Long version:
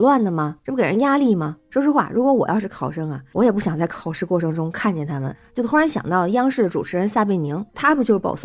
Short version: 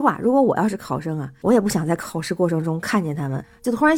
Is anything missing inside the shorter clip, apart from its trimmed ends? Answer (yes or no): no